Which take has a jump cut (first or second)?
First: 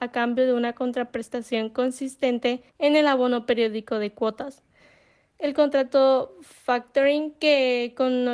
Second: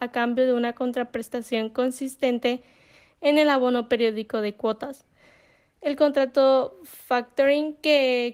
first